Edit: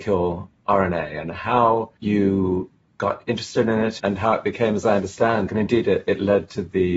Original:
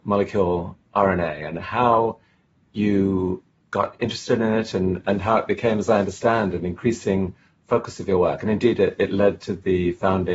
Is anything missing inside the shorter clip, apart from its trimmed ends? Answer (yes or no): yes